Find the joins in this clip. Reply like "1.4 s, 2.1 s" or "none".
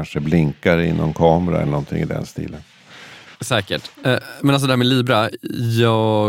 3.3 s